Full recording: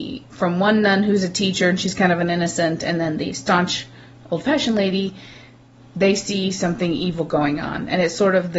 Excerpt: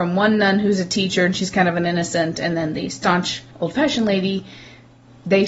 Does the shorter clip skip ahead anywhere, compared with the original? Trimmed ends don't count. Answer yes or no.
yes